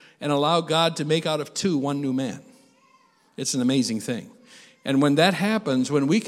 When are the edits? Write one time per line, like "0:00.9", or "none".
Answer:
none